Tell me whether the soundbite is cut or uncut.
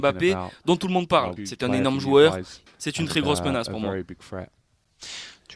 cut